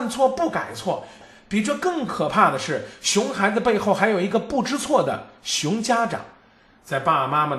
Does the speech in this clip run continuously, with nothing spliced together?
yes; 0 cuts

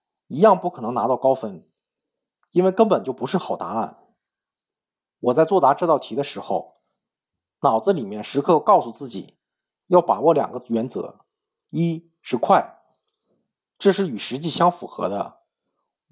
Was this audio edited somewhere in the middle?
no; 0 cuts

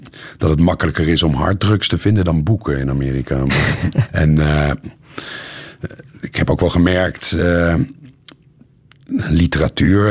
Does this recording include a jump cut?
yes; 1 cut; at 4.1 s

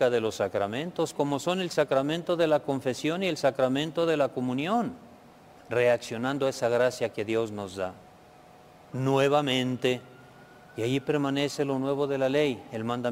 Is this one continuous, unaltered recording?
no; 3 cuts; at 1.1 s, 5.6 s, 8.9 s

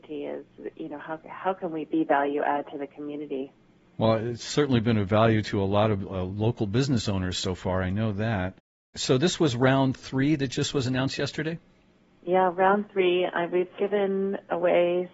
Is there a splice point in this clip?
no; 0 cuts

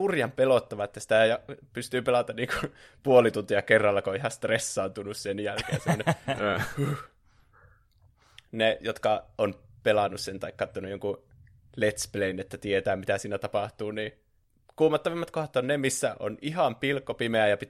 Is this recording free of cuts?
yes; 0 cuts

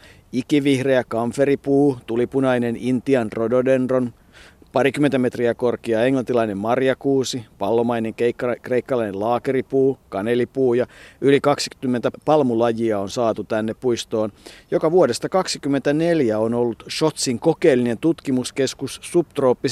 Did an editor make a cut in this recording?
no; 0 cuts

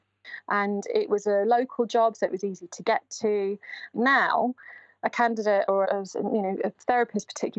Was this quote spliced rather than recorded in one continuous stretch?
yes; 2 cuts; at 3.9 s, 5.8 s

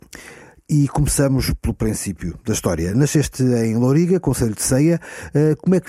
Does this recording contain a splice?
no; 0 cuts

